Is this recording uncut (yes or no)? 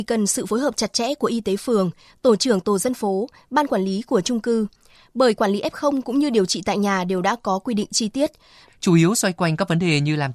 no